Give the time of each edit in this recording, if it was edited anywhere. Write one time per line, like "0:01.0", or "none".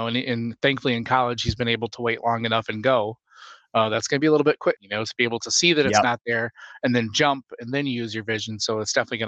0:04.7